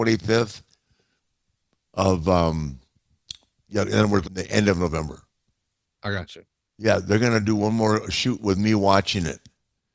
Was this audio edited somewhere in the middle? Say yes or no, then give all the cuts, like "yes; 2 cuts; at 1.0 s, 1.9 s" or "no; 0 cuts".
yes; 1 cut; at 4.2 s